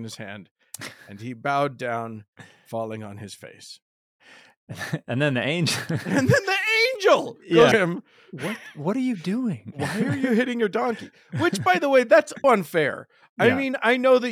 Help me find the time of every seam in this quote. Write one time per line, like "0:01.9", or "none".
0:07.7
0:12.4